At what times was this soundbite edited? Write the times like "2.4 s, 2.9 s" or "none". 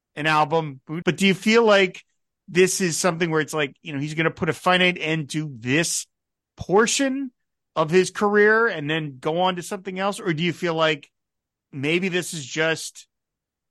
1.0 s